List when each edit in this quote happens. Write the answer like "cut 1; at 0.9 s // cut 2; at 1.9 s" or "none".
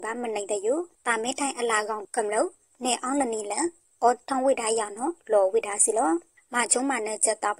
cut 1; at 2.0 s